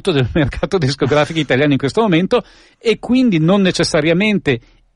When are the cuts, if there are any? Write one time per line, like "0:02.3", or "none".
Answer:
none